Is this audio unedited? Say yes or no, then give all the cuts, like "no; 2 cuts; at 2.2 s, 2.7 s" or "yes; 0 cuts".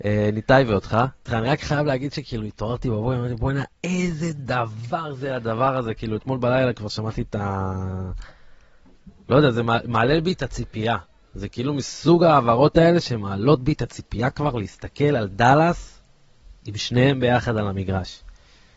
no; 1 cut; at 1.3 s